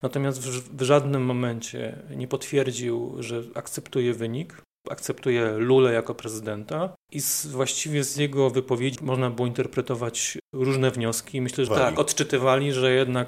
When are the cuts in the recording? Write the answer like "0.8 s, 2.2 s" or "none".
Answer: 9.0 s, 11.7 s